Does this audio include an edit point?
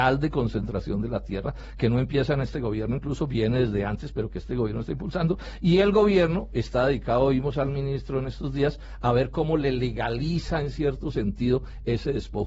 no; 0 cuts

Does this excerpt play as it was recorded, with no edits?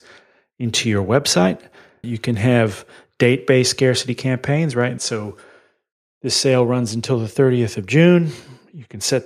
no; 2 cuts; at 2.0 s, 5.0 s

